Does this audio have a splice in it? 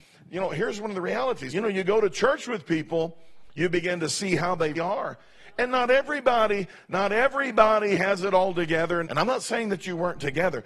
yes; 3 cuts; at 1.5 s, 4.7 s, 9.0 s

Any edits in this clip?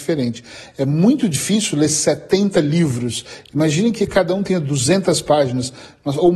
no; 0 cuts

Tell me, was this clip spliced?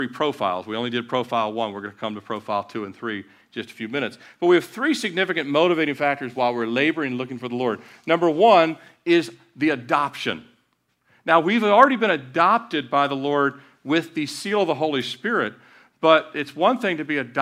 no; 0 cuts

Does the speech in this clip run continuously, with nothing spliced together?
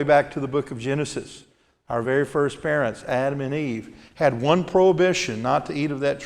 yes; 0 cuts

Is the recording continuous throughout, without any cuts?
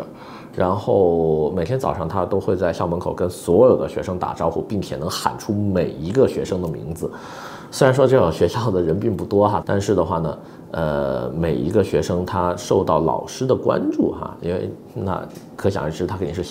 no; 1 cut; at 9.6 s

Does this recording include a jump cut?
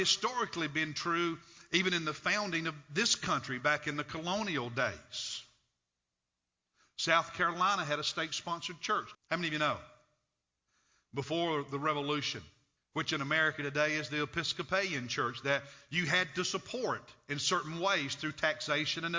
yes; 2 cuts; at 9.1 s, 12.8 s

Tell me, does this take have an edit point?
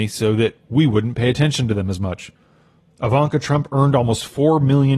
no; 0 cuts

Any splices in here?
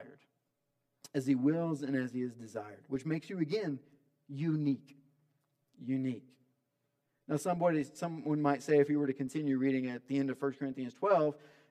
no; 0 cuts

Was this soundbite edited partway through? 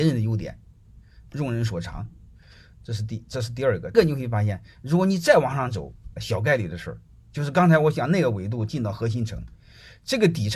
yes; 2 cuts; at 3.9 s, 6.2 s

